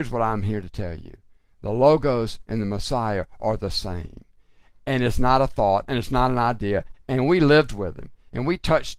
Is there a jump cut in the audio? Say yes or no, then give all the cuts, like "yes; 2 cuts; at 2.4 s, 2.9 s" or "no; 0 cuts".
yes; 2 cuts; at 5.9 s, 6.9 s